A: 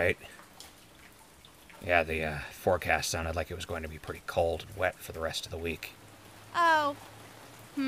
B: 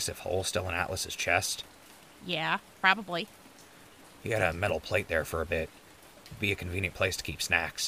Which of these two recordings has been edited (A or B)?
B